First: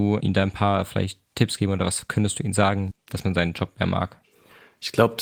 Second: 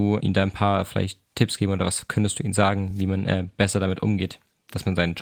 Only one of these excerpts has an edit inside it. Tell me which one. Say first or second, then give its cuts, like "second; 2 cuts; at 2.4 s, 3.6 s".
first; 1 cut; at 2.9 s